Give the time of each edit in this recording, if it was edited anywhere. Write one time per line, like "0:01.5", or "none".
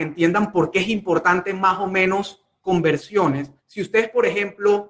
0:03.6

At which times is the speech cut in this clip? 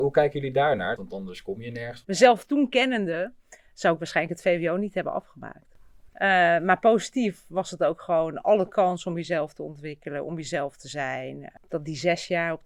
0:01.0
0:02.0
0:06.1

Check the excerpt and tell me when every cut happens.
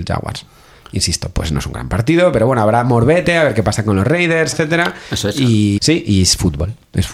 0:04.5
0:05.8

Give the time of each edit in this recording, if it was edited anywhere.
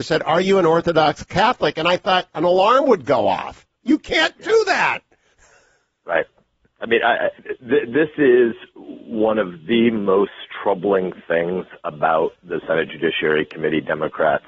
0:07.4

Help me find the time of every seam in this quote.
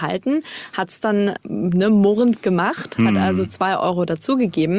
none

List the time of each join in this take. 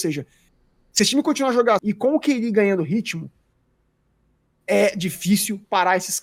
0:01.8

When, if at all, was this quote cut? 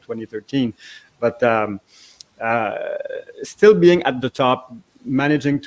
none

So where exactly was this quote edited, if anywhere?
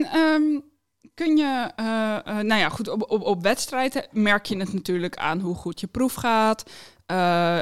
none

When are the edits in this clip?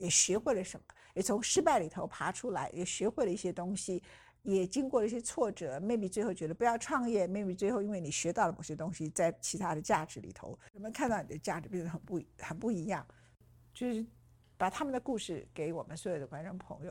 none

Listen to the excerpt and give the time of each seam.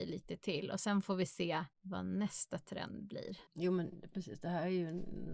0:03.5

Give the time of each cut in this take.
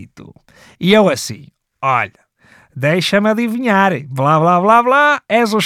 none

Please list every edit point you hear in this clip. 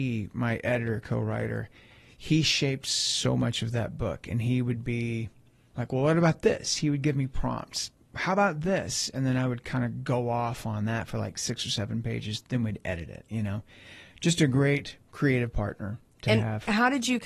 none

